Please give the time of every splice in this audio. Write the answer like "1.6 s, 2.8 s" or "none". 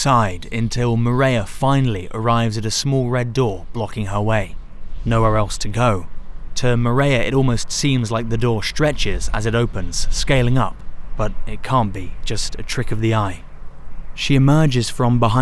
6.6 s